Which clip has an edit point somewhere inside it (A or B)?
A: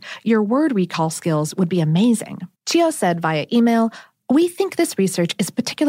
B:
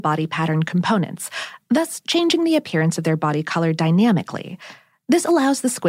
A